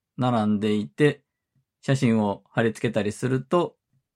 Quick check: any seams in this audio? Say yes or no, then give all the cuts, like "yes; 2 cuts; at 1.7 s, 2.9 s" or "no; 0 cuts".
yes; 1 cut; at 1.6 s